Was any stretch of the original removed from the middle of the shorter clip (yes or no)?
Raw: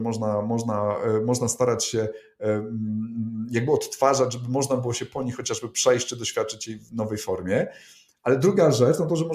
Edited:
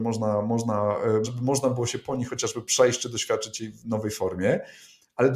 yes